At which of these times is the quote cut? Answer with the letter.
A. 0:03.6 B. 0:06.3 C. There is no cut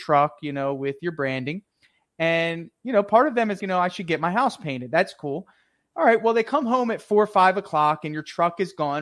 A